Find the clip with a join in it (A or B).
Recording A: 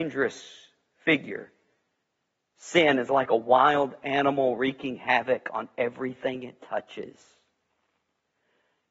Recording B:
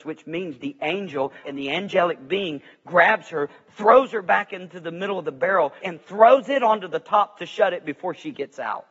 B